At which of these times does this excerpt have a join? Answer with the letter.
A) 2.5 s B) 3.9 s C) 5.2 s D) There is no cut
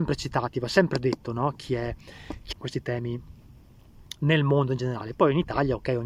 A